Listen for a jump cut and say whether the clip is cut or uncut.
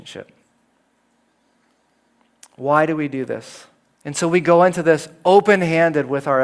cut